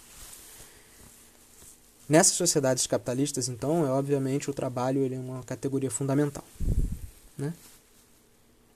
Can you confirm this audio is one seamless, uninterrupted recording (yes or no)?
yes